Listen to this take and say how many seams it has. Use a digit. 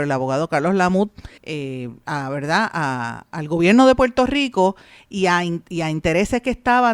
1